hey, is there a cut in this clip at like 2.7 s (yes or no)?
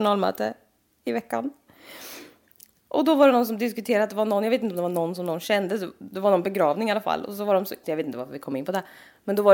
no